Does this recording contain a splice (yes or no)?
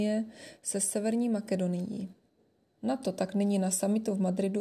yes